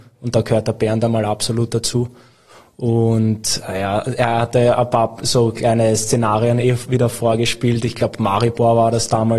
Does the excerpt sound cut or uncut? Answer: uncut